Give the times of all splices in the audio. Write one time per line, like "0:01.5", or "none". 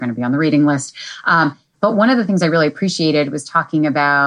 none